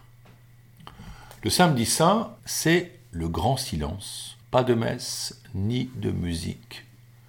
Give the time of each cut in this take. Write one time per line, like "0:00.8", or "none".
0:02.4
0:04.4